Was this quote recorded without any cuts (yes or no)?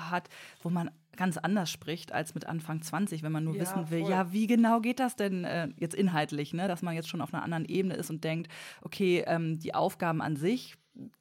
yes